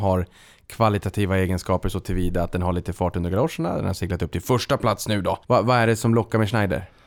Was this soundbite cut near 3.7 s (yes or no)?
no